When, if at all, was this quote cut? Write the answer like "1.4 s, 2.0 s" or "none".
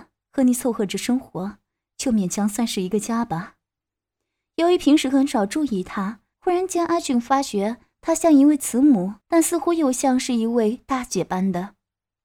6.3 s, 9.2 s